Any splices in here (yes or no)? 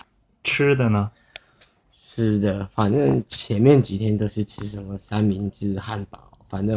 no